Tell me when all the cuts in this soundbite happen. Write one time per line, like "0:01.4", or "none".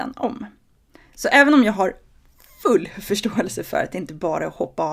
0:01.0